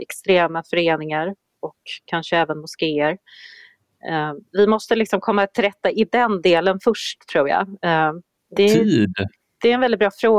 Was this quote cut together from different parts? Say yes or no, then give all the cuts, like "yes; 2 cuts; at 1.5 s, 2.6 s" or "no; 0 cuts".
yes; 1 cut; at 8.6 s